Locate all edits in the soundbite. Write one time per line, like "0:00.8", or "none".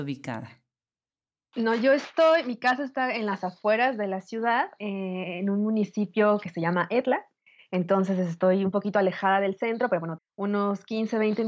0:10.2